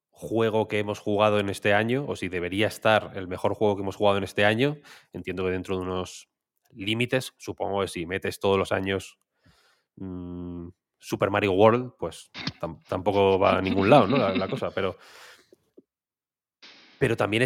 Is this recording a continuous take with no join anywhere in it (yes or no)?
yes